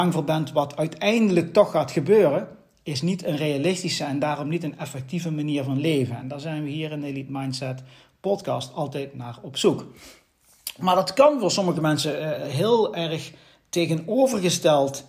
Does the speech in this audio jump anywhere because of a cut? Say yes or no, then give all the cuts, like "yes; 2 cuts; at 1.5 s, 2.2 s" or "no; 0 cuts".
no; 0 cuts